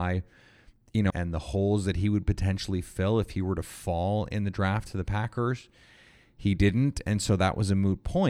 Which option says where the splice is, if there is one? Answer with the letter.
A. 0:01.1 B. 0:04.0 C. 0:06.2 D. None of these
A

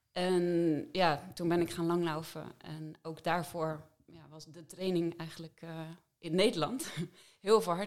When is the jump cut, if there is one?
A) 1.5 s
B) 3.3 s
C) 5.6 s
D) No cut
D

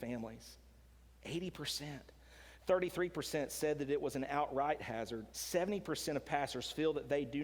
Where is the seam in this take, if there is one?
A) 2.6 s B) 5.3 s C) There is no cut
B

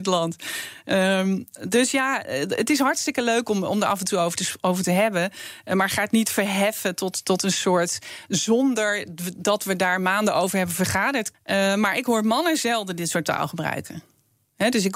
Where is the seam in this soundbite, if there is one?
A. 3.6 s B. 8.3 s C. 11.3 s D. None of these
C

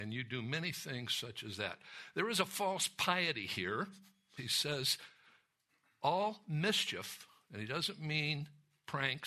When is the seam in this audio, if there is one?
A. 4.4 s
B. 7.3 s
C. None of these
A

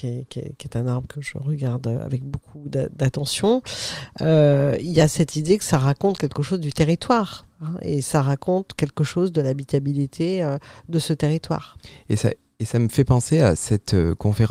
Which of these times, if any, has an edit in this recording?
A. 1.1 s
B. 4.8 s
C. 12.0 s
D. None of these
A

